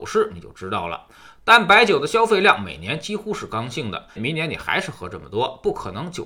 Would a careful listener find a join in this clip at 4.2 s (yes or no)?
yes